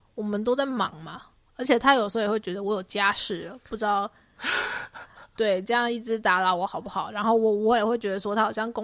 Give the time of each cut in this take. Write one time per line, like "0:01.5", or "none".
none